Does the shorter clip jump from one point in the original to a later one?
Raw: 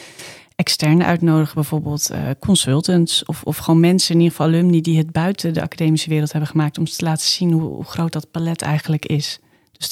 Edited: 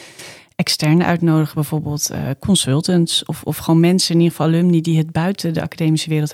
no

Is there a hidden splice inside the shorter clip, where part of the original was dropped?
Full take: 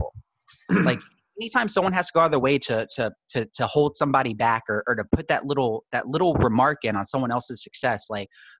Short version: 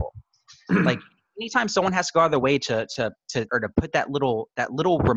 yes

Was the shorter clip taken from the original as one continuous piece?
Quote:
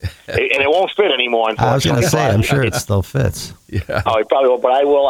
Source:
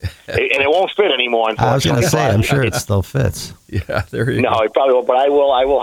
no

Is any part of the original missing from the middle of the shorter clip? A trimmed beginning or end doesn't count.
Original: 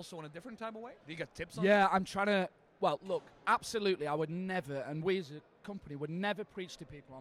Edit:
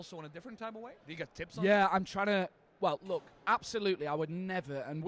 no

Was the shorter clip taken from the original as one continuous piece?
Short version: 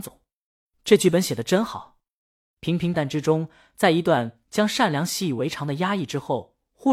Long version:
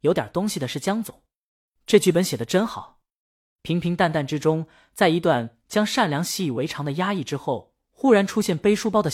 no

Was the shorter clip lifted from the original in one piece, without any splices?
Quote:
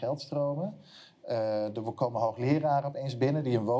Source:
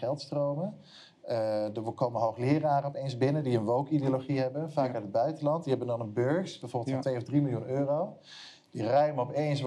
yes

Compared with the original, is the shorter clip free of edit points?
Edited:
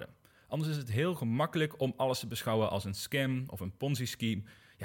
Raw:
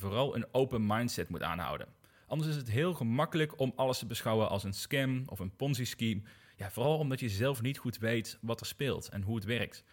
yes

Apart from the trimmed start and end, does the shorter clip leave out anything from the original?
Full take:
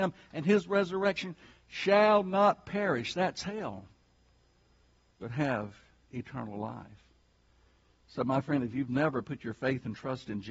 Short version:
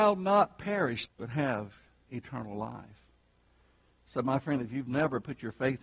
yes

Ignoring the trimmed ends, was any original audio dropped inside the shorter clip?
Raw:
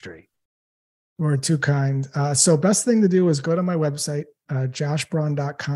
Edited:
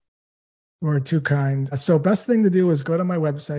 yes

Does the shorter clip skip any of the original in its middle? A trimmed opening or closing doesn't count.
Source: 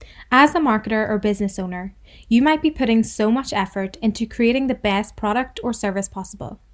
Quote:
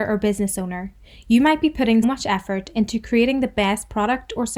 yes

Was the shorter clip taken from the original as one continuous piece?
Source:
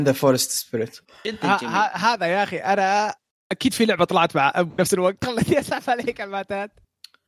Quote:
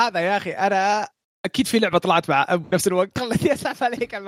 yes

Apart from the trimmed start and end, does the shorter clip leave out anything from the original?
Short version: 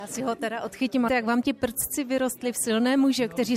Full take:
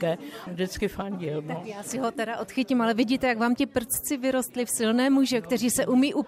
yes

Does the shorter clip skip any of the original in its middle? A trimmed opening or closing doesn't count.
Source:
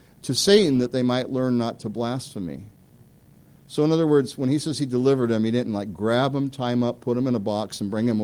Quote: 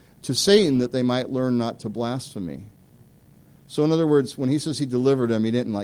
no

